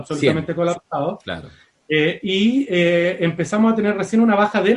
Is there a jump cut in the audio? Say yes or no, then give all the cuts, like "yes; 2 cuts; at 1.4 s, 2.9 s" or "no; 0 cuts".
no; 0 cuts